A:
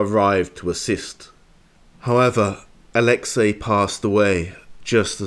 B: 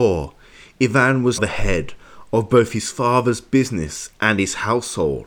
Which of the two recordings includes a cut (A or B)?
B